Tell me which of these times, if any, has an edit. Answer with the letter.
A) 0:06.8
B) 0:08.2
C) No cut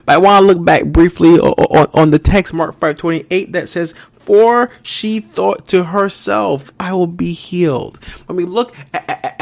A